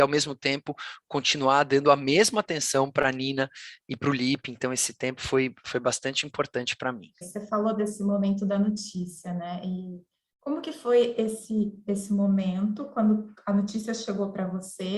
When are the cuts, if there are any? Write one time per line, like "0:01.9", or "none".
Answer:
0:07.2